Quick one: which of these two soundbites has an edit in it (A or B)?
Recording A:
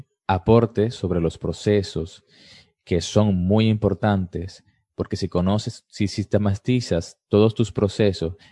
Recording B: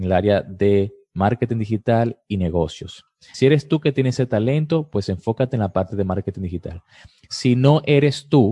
B